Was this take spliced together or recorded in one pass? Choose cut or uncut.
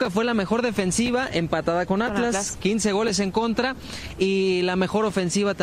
uncut